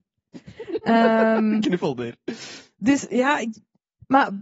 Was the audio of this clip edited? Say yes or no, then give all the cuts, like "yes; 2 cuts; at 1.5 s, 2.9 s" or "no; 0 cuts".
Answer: no; 0 cuts